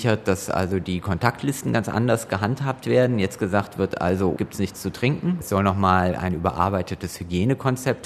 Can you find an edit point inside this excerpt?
yes; 1 cut; at 4.4 s

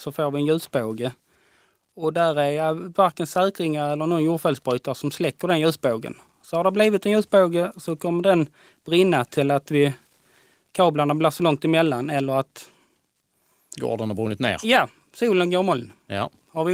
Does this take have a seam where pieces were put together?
no; 0 cuts

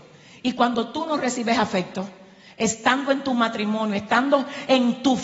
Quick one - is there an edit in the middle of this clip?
no; 0 cuts

